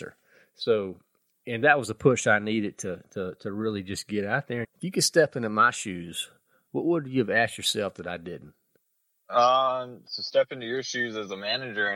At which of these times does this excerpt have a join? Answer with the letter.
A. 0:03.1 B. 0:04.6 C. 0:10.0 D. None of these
B